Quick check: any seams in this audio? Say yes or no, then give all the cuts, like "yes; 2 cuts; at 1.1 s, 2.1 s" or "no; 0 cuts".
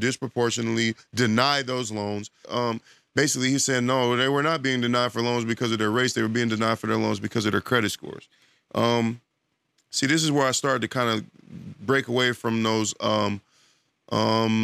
yes; 1 cut; at 2.4 s